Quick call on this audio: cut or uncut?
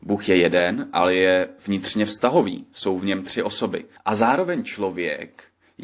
cut